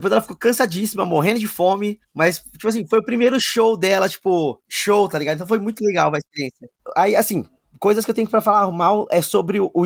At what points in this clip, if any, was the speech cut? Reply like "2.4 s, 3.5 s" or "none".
none